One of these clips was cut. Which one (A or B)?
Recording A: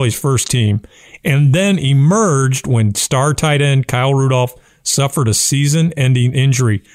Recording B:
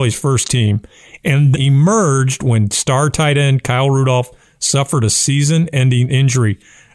B